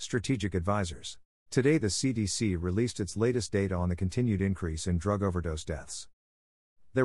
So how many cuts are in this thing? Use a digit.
1